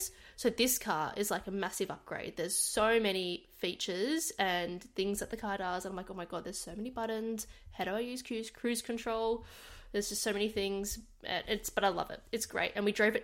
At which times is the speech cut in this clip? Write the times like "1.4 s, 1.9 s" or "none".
none